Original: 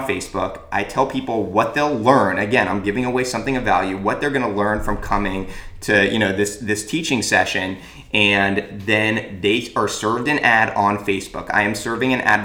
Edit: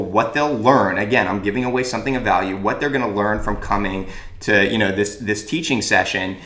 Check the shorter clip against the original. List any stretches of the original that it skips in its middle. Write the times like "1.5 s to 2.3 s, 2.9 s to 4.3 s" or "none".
none

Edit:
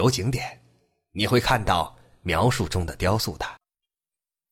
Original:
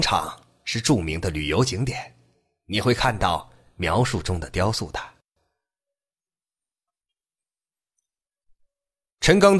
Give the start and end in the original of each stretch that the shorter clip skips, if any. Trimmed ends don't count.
5.1 s to 6.8 s

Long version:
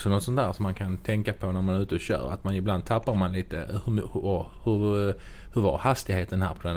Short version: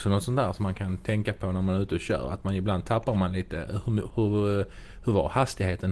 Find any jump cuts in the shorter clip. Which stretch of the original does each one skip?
4.1 s to 4.6 s

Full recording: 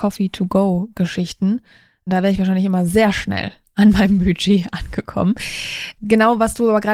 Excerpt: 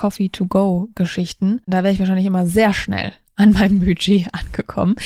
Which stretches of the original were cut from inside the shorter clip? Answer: 1.6 s to 2.0 s

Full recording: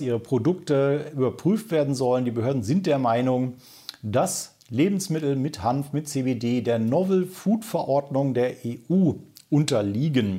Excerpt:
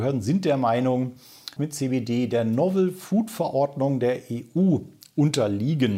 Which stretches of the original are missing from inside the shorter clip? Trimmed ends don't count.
4.0 s to 5.9 s

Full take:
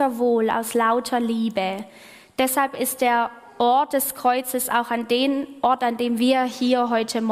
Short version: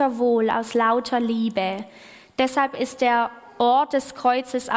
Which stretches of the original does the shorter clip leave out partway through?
none

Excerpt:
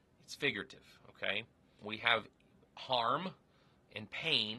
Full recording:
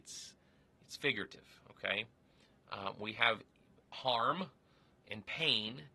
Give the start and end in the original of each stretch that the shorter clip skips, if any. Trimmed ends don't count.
2.4 s to 3.0 s

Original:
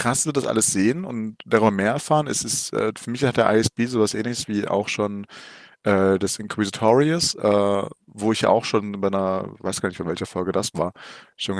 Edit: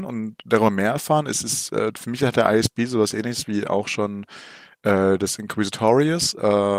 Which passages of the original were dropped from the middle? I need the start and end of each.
none

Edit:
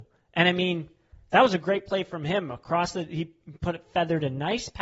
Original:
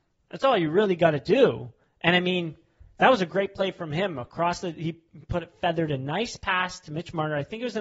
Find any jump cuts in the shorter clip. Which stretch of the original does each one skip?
none

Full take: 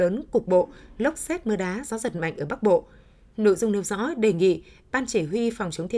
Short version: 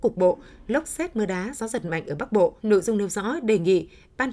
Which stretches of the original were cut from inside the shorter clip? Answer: 2.9 s to 3.3 s

